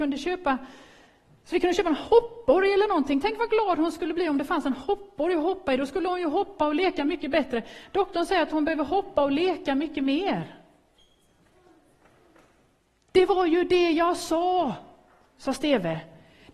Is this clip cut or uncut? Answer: uncut